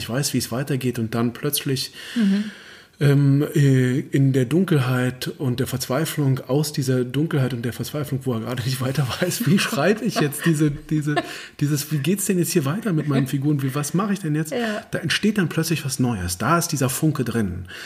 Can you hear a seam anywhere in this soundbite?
no; 0 cuts

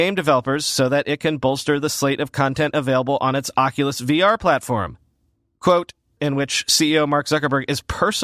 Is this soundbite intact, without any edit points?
no; 1 cut; at 6.2 s

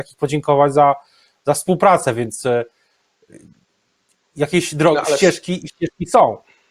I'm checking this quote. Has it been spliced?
no; 0 cuts

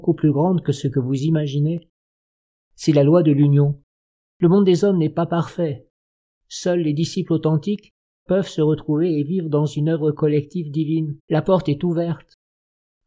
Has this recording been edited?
yes; 3 cuts; at 4.3 s, 8.3 s, 11.2 s

